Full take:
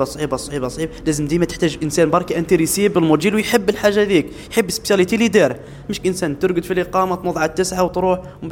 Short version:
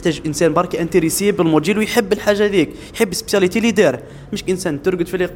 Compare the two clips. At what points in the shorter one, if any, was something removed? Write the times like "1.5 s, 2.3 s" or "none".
none